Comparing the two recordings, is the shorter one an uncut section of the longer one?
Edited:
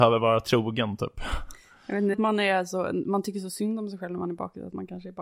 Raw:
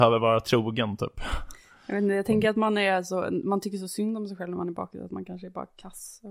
no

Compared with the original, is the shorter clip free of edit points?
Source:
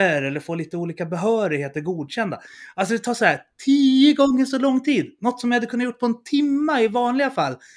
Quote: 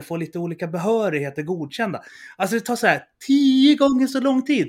yes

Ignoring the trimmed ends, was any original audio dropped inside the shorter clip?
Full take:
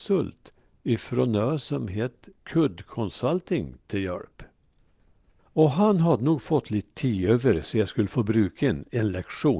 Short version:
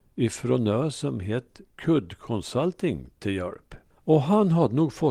yes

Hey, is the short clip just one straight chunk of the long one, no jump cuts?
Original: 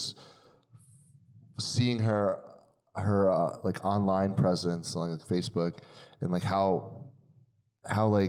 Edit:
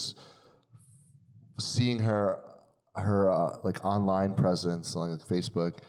yes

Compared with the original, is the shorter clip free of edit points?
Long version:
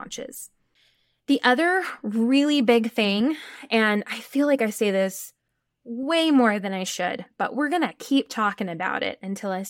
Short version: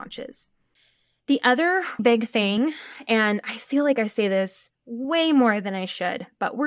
no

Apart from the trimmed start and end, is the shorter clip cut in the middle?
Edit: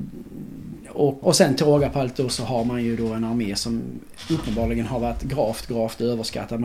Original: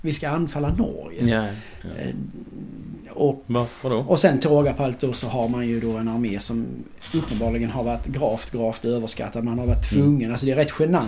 yes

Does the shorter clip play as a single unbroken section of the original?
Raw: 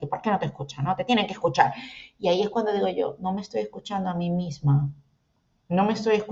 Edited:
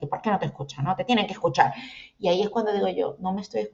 yes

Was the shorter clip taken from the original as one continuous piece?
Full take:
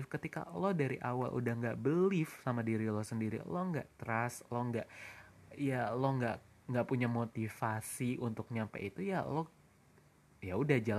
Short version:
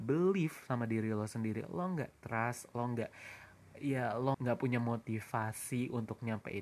no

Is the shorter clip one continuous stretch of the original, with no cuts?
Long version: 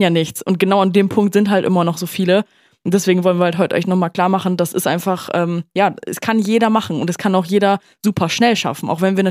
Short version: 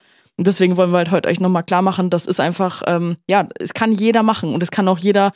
yes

